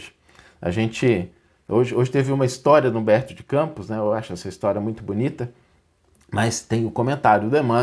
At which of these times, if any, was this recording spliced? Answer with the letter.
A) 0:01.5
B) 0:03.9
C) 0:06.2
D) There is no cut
D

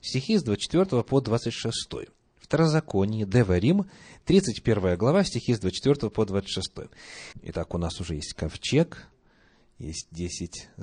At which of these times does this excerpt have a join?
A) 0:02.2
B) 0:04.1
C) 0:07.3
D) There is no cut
C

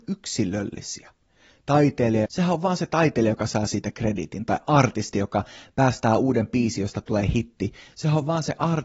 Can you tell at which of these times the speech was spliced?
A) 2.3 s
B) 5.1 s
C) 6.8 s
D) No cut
A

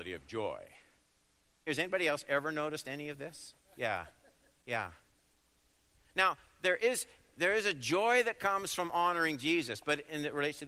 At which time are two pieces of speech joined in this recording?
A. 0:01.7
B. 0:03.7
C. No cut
A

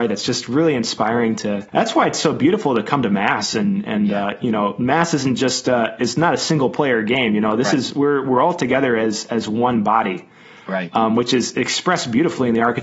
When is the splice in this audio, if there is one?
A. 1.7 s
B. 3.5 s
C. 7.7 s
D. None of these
A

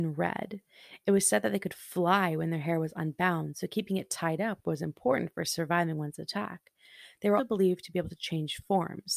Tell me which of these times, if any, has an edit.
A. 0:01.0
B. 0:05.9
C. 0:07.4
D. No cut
C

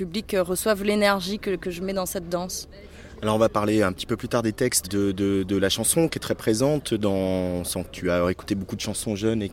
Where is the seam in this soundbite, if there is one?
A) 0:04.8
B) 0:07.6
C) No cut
A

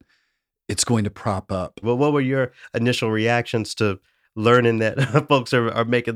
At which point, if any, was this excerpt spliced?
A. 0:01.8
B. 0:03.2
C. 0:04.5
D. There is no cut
A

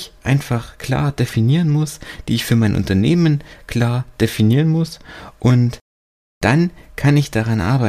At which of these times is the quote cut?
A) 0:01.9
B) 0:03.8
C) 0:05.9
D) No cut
D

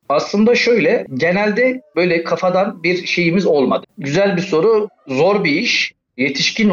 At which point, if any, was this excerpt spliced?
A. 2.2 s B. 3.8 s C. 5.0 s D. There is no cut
B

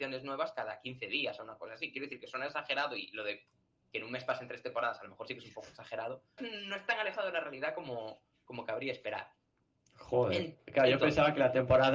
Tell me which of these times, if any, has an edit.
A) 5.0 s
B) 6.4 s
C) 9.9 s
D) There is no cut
B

